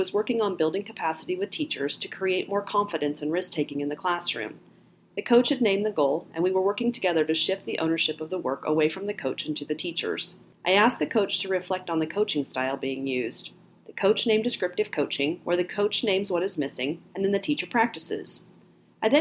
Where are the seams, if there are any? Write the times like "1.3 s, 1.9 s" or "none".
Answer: 10.5 s, 17.1 s